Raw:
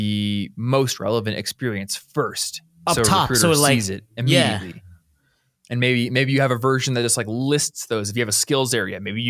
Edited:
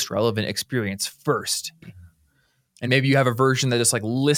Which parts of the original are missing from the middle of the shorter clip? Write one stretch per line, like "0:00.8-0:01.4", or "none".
0:02.7-0:04.7
0:05.7-0:06.1